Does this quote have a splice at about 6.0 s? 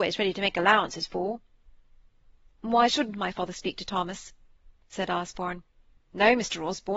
yes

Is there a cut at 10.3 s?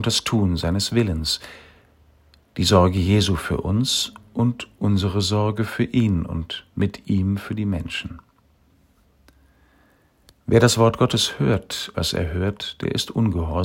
no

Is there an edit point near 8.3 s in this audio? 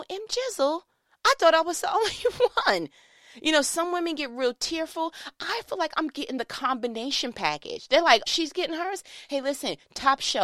yes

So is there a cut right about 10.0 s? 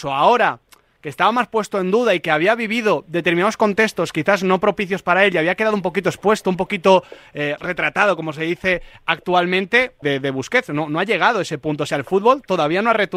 yes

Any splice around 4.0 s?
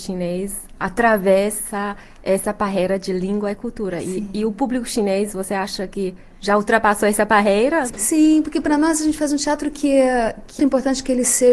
no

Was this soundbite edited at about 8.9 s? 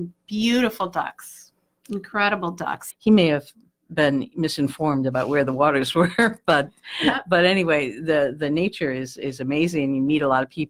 no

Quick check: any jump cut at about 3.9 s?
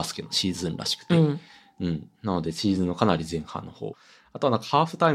yes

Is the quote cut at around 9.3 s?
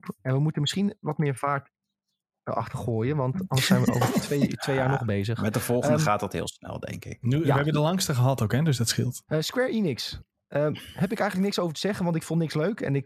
yes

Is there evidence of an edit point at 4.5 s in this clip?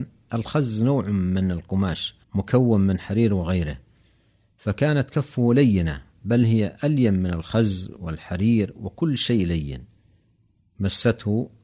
no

